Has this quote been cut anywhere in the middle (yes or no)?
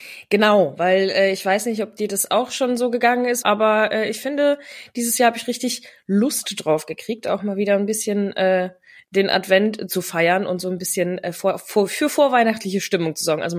yes